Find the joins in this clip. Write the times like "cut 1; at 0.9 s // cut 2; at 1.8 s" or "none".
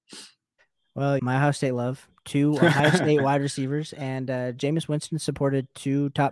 cut 1; at 1.2 s